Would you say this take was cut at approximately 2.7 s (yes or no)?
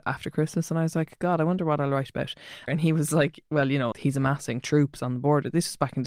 yes